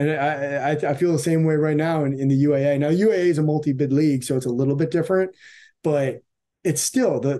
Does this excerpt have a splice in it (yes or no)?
no